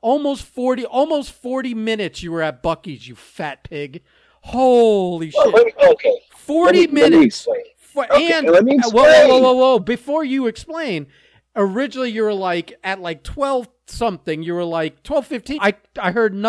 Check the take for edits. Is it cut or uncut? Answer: cut